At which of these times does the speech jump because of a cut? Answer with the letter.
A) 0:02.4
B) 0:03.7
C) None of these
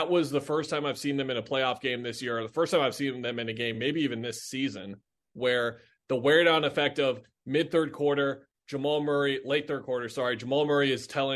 C